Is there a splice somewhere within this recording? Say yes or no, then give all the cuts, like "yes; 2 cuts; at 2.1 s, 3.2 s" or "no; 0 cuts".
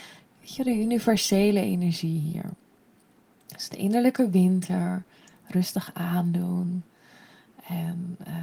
no; 0 cuts